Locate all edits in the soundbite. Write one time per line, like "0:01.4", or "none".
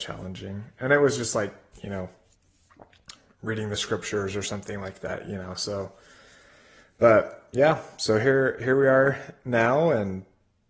none